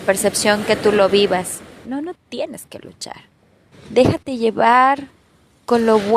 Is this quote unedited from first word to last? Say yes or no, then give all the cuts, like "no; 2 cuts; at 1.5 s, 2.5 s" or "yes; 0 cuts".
no; 2 cuts; at 1.8 s, 3.7 s